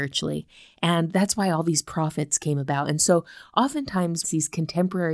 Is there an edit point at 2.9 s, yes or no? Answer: no